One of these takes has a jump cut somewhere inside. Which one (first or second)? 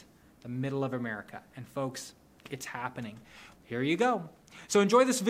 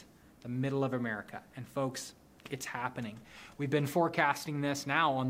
first